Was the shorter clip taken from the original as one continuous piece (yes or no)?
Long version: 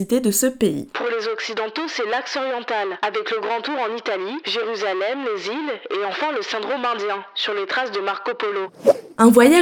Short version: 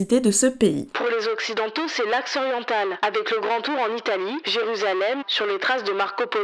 no